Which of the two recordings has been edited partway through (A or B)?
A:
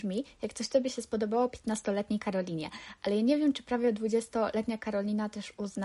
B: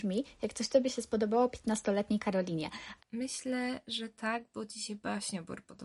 B